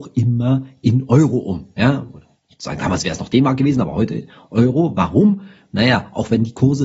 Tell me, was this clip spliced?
no; 0 cuts

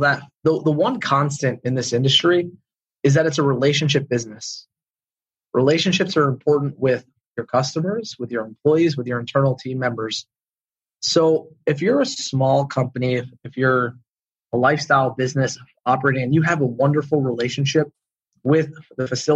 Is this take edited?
no; 0 cuts

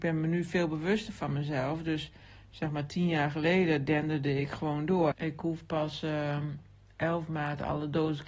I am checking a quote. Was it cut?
yes; 1 cut; at 5.1 s

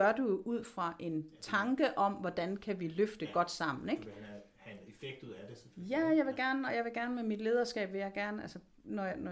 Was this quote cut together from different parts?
no; 0 cuts

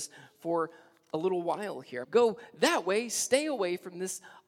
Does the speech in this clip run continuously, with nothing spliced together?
no; 1 cut; at 2.0 s

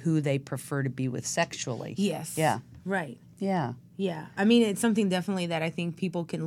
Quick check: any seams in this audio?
no; 0 cuts

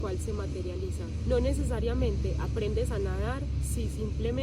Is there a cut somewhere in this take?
yes; 1 cut; at 1.3 s

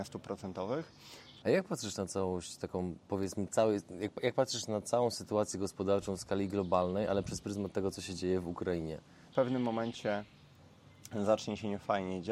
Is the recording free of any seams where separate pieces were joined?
no; 2 cuts; at 1.4 s, 9.3 s

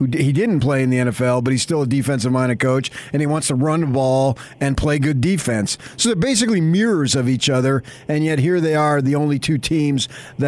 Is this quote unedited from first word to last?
yes; 0 cuts

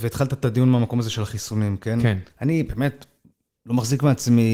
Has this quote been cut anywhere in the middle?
yes; 1 cut; at 2.3 s

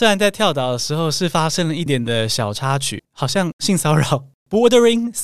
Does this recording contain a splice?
yes; 2 cuts; at 1.9 s, 3.0 s

